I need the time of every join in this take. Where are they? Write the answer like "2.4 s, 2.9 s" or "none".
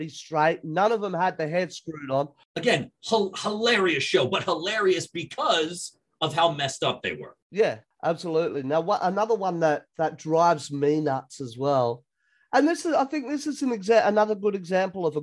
none